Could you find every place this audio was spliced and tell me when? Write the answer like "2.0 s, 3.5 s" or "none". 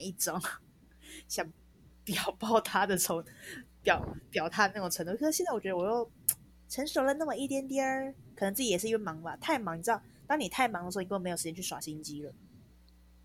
none